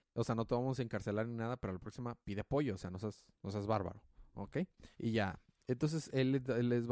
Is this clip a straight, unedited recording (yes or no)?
no